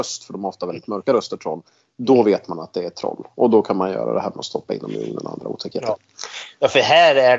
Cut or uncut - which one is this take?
uncut